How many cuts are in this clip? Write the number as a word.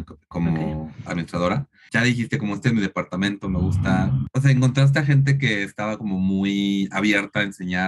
one